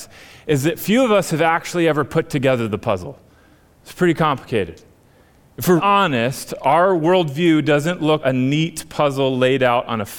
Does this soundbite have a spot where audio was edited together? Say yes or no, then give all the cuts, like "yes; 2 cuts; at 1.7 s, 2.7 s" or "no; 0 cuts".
yes; 2 cuts; at 5.8 s, 8.2 s